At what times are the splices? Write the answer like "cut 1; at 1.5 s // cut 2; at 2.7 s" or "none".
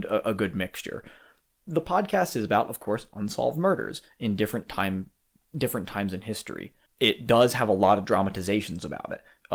none

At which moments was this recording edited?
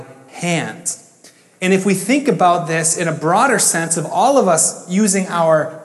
none

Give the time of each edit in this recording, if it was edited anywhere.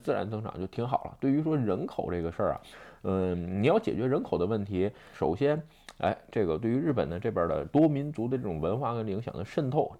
cut 1; at 5.1 s

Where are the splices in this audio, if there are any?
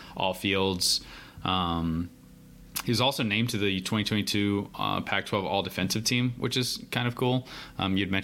none

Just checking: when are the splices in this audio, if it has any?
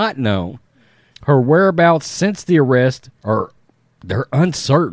cut 1; at 1.1 s // cut 2; at 3.2 s

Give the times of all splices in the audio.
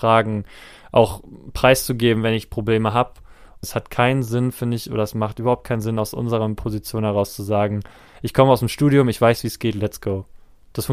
cut 1; at 3.6 s

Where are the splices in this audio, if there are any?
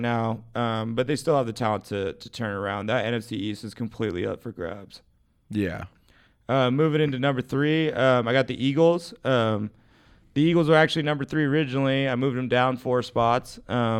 none

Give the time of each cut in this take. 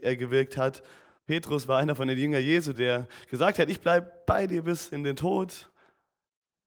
cut 1; at 1.2 s // cut 2; at 2.7 s

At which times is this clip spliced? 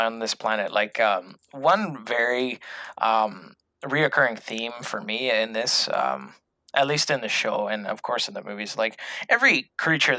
none

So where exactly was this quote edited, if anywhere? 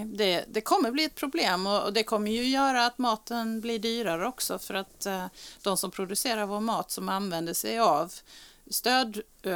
none

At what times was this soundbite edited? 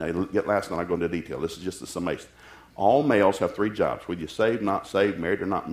none

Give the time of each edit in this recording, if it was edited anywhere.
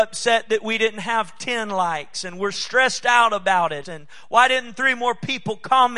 cut 1; at 3.8 s

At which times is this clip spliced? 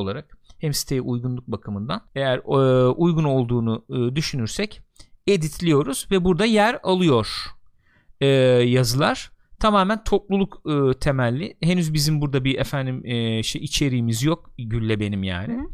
cut 1; at 2.1 s

